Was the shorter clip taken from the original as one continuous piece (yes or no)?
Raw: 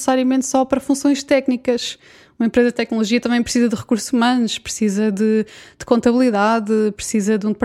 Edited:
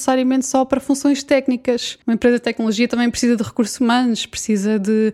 no